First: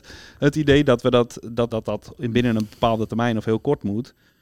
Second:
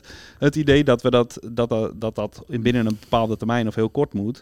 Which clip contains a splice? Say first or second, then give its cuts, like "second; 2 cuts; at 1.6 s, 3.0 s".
first; 1 cut; at 1.7 s